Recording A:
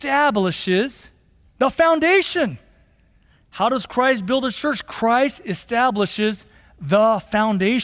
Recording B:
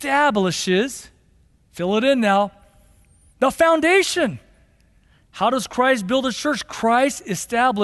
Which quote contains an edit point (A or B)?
A